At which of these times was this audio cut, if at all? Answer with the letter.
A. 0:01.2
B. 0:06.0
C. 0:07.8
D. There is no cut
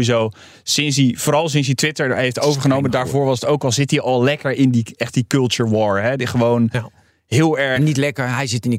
D